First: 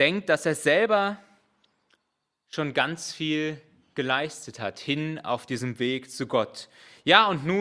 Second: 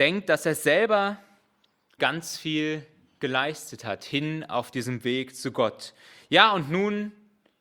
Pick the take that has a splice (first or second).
second